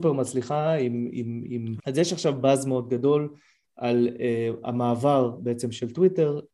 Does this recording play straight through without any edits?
no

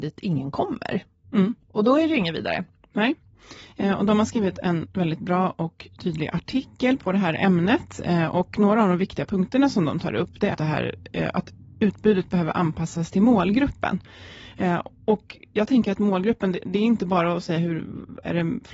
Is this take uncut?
no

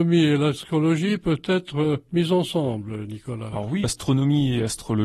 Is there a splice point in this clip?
yes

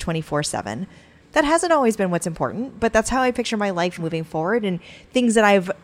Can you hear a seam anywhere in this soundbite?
yes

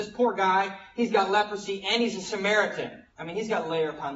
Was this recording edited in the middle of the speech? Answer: yes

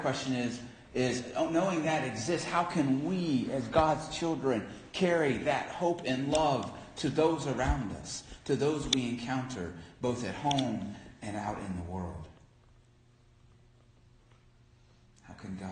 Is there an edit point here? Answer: no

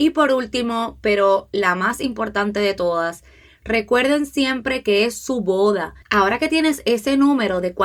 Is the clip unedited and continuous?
no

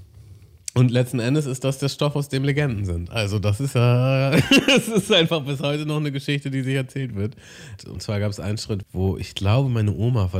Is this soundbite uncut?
no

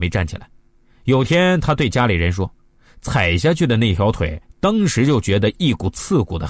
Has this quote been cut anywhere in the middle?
no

